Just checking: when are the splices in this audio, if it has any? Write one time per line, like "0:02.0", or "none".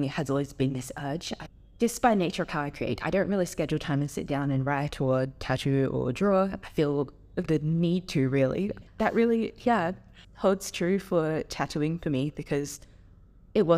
0:08.9
0:10.2